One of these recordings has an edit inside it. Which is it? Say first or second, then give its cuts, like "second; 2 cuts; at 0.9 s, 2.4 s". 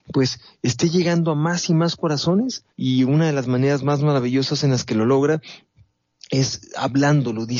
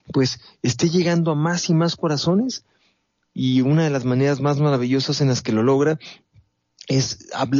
first; 1 cut; at 2.7 s